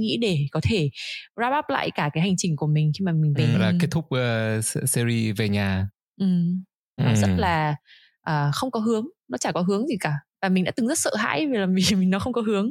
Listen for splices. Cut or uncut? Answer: cut